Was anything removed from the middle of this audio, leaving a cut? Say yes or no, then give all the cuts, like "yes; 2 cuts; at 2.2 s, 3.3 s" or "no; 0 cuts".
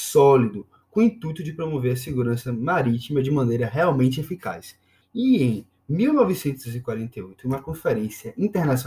yes; 1 cut; at 5.0 s